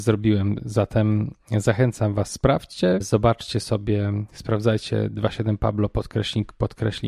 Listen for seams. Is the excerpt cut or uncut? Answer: cut